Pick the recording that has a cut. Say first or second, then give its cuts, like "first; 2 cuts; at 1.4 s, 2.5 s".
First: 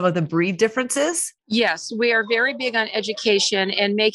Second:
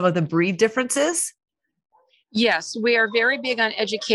first; 1 cut; at 1.4 s